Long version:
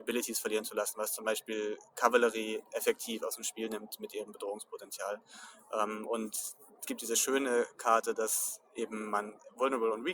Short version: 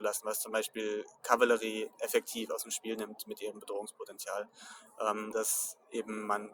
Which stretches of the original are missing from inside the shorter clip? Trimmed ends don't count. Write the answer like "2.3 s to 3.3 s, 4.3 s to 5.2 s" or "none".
6.0 s to 8.2 s